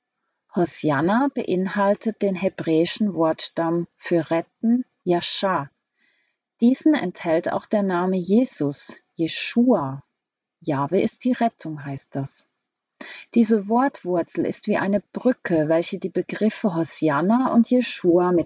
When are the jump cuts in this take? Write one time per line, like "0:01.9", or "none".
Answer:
0:05.0